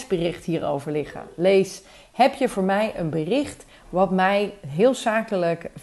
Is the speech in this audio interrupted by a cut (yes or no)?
no